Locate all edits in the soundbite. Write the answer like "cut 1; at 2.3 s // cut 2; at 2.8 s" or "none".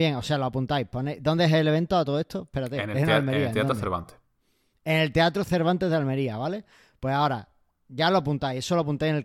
none